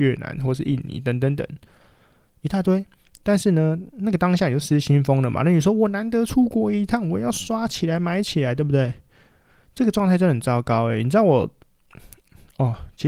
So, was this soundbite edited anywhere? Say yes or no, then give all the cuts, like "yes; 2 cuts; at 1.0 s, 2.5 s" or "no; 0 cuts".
no; 0 cuts